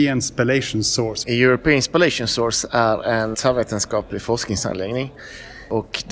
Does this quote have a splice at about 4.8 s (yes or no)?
no